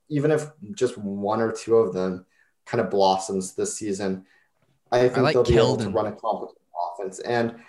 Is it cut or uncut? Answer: uncut